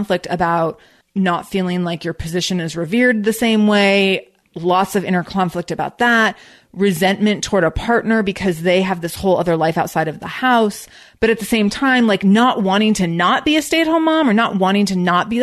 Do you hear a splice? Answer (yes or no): yes